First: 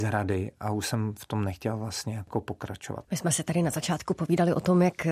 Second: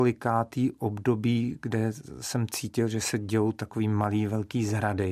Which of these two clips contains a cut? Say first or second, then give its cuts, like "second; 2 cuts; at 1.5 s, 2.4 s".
first; 1 cut; at 3.0 s